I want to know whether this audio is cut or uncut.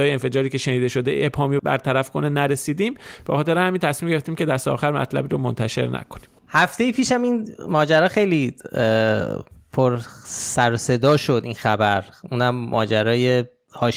cut